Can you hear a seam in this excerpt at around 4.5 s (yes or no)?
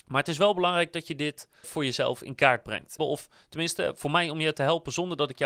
no